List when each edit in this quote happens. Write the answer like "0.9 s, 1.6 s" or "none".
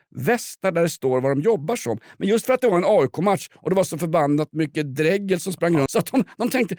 5.9 s